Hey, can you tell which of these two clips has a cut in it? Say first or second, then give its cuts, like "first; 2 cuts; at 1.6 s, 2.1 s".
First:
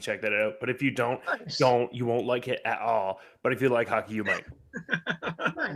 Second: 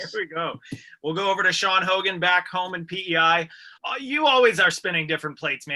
second; 1 cut; at 3.8 s